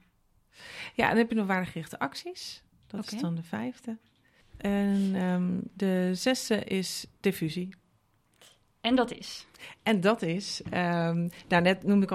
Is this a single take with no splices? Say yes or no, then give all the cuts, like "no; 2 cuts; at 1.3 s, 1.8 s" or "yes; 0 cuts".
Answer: yes; 0 cuts